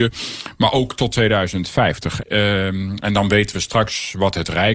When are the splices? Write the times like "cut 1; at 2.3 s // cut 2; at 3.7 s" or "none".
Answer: cut 1; at 2.2 s